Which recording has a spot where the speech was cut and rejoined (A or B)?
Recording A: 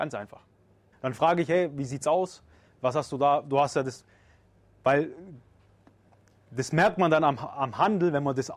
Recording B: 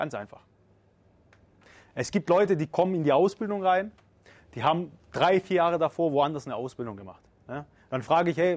A